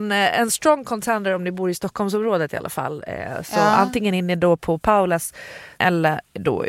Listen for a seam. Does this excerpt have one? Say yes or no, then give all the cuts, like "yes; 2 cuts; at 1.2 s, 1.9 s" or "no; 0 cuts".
yes; 1 cut; at 5.8 s